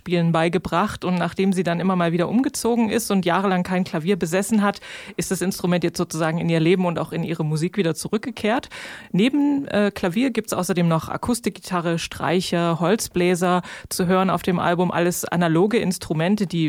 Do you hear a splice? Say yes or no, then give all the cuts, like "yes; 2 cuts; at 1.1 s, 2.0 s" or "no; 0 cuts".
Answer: no; 0 cuts